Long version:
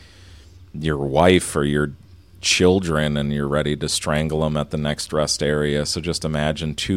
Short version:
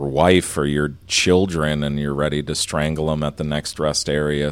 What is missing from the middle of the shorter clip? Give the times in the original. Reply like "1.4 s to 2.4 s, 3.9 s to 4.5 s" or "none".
2.0 s to 2.3 s